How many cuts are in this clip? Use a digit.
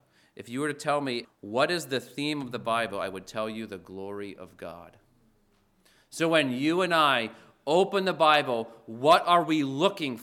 1